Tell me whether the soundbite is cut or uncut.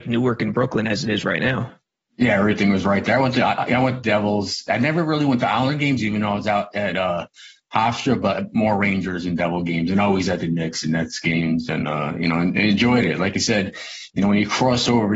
uncut